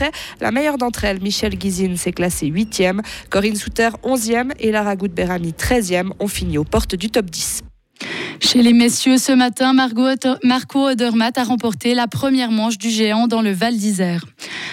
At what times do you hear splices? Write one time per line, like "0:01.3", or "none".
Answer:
none